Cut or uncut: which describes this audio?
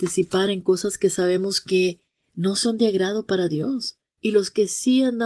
cut